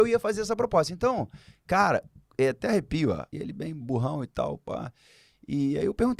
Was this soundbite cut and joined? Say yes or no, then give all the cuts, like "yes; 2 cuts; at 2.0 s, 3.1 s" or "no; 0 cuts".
yes; 1 cut; at 3.3 s